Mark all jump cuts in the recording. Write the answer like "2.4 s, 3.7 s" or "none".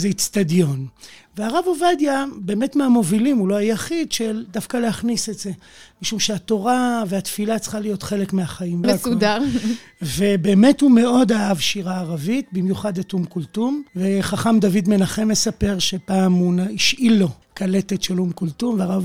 8.8 s, 13.9 s, 17.4 s